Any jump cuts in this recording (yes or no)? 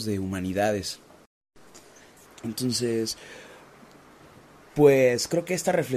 yes